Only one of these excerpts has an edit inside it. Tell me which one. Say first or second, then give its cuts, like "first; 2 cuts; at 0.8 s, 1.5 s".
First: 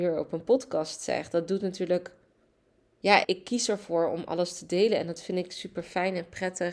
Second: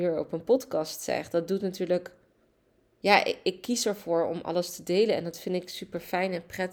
first; 1 cut; at 3.2 s